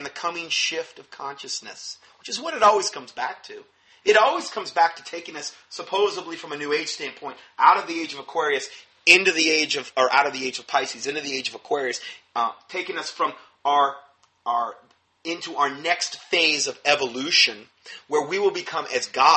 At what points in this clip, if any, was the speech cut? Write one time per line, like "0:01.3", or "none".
none